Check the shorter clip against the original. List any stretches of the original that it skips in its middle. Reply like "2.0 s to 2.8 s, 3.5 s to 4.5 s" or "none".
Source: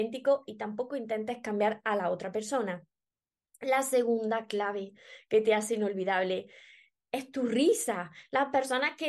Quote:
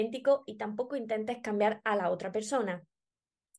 none